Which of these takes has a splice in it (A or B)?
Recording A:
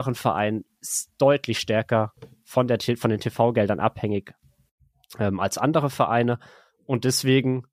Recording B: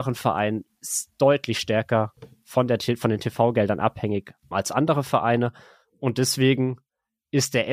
B